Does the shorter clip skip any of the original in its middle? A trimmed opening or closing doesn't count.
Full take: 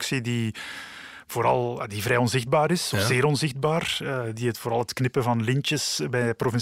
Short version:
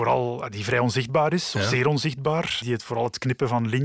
yes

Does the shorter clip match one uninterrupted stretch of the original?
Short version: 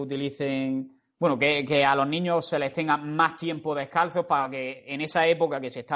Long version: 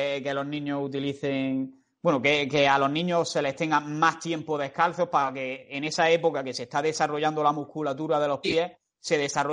yes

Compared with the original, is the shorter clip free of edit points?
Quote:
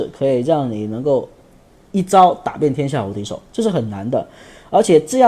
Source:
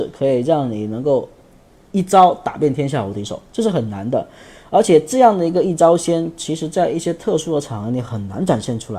yes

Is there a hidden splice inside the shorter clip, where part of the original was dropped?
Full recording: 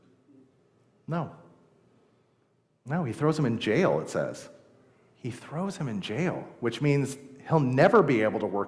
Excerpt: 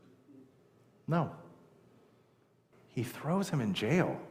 yes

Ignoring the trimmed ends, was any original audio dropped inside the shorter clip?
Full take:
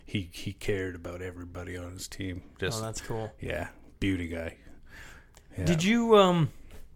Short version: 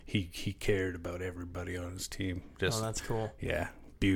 no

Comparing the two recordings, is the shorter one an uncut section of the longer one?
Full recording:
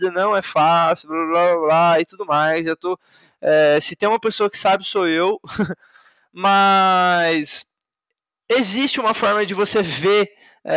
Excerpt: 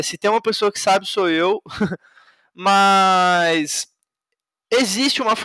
yes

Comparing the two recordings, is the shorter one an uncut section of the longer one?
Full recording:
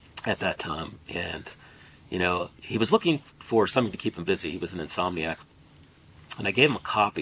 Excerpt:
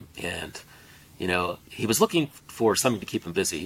yes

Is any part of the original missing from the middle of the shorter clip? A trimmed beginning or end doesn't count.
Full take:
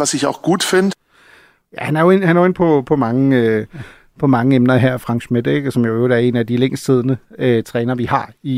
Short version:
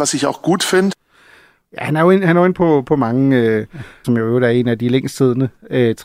yes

